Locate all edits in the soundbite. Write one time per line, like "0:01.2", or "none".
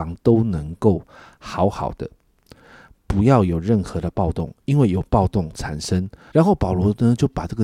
0:06.3